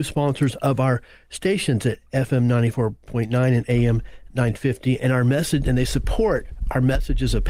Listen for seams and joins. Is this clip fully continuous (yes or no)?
yes